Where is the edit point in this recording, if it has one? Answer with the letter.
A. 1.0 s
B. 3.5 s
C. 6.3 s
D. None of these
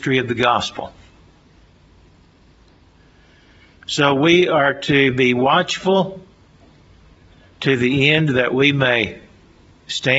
D